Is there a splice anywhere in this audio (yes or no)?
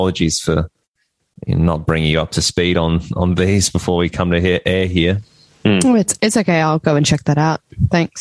no